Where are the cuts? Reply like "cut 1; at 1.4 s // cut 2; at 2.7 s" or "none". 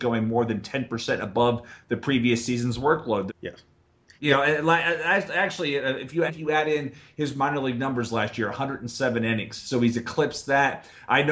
cut 1; at 3.3 s // cut 2; at 6.3 s

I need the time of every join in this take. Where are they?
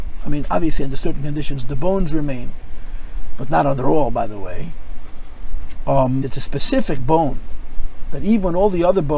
cut 1; at 6.2 s

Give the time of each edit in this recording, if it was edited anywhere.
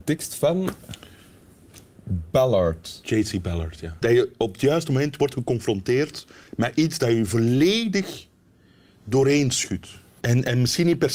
cut 1; at 4.0 s // cut 2; at 10.2 s

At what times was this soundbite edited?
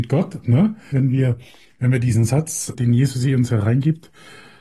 cut 1; at 0.9 s // cut 2; at 2.7 s

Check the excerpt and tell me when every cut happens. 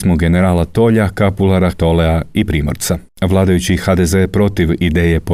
cut 1; at 1.7 s

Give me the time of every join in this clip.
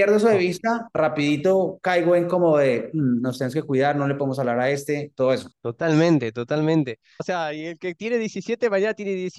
cut 1; at 5.5 s // cut 2; at 7.2 s

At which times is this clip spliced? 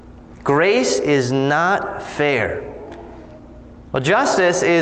cut 1; at 3.9 s

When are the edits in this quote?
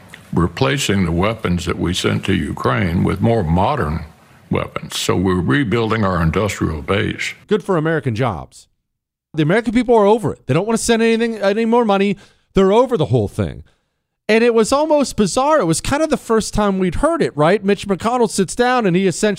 cut 1; at 7.4 s // cut 2; at 9.3 s

